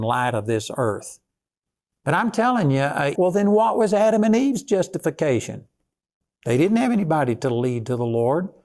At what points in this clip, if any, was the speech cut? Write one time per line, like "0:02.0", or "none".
0:03.2